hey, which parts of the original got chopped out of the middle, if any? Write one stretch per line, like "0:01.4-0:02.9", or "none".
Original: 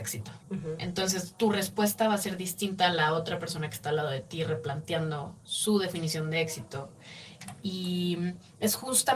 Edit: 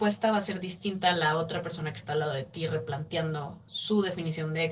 none